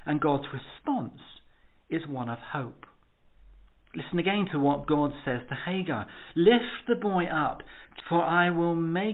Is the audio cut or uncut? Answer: cut